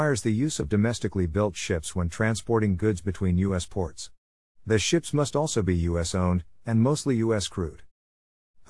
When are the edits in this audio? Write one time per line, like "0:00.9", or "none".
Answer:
none